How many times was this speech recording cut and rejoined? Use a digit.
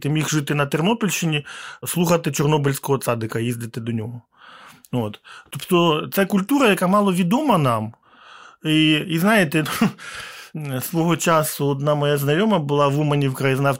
0